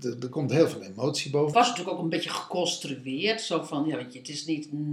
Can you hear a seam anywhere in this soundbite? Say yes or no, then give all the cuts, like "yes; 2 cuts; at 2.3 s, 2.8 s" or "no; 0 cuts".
yes; 1 cut; at 1.5 s